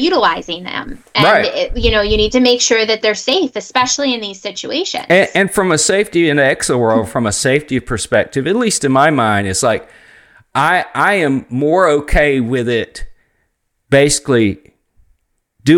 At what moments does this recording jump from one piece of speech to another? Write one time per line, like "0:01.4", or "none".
none